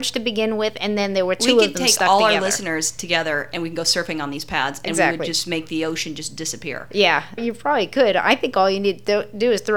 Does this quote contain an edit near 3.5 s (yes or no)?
no